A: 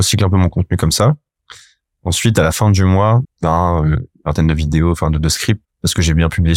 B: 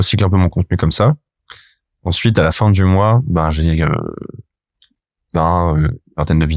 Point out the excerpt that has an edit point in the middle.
A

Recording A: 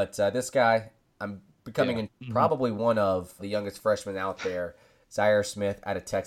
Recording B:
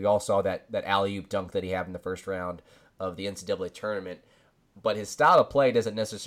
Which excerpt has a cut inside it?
A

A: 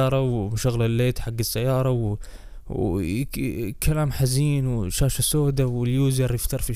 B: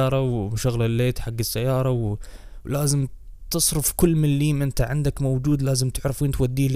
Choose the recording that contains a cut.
B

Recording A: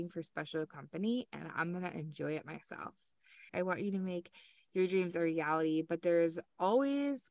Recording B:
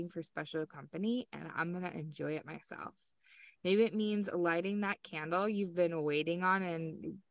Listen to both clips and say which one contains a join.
A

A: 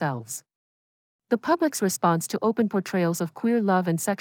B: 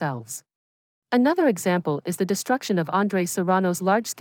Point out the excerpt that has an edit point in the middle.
B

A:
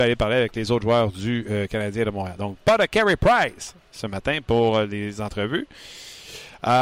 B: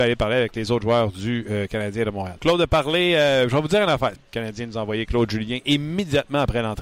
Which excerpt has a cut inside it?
B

